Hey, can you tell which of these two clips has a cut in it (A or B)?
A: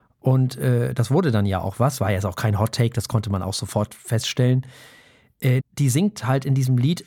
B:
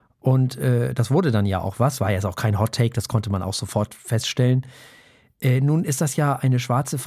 A